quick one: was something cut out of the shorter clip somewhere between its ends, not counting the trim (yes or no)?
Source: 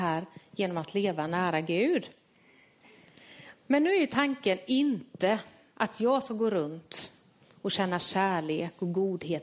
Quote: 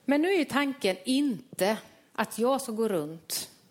no